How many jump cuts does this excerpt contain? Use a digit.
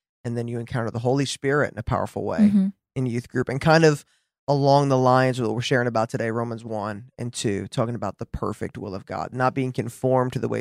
1